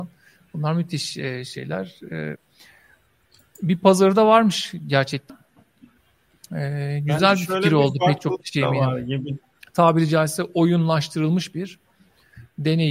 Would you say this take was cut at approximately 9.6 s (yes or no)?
yes